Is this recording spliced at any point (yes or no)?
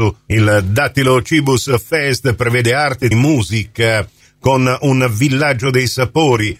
yes